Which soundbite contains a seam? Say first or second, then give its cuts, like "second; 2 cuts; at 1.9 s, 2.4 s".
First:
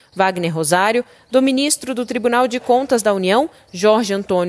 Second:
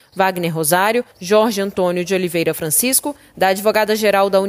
second; 1 cut; at 1.1 s